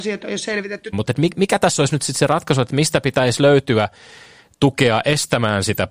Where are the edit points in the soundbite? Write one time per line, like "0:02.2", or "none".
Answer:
0:00.9